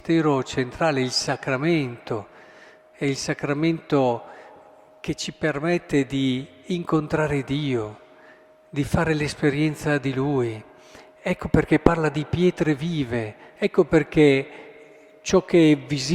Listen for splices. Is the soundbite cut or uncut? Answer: uncut